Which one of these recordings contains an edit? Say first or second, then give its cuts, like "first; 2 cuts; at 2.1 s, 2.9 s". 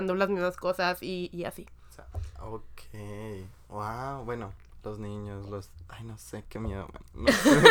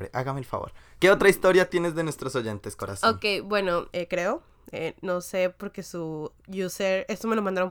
second; 2 cuts; at 1.0 s, 3.9 s